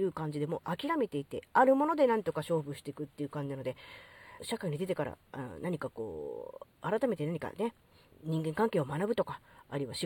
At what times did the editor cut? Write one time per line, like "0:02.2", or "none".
0:04.4
0:08.1